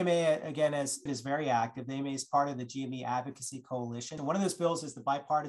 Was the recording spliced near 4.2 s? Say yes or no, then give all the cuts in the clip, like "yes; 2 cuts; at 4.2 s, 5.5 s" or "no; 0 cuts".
yes; 2 cuts; at 1.1 s, 4.2 s